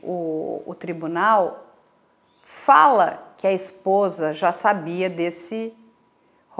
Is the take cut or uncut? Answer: uncut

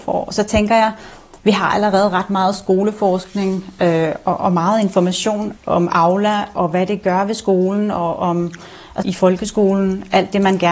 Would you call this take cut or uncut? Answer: cut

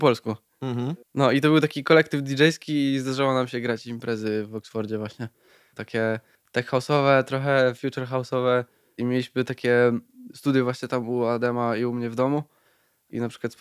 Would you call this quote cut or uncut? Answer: uncut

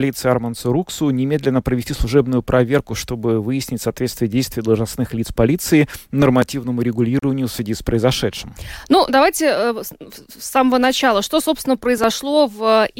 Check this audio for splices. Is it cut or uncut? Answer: uncut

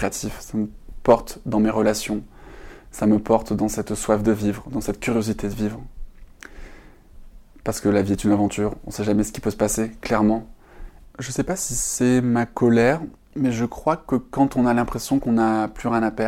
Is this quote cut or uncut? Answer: cut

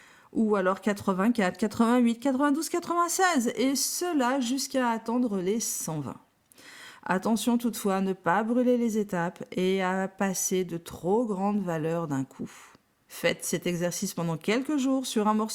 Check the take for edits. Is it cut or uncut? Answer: uncut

